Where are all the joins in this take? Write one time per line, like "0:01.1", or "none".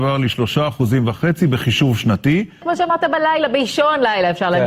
none

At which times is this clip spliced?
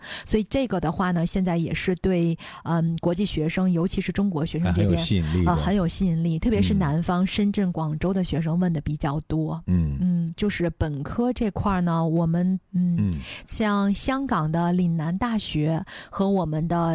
0:10.4
0:12.7

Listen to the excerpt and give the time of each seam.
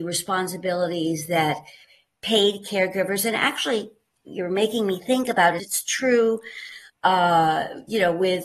0:05.6
0:06.9

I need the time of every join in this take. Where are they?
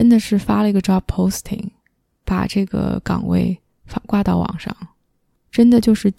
none

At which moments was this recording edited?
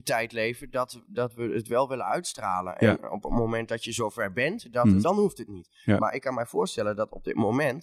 0:05.0

